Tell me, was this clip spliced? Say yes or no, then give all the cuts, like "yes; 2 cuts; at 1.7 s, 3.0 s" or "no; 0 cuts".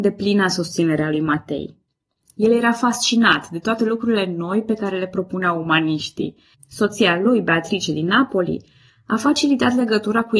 yes; 1 cut; at 6.5 s